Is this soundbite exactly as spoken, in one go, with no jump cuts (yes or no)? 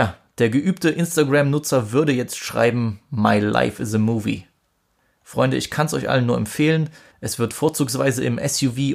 no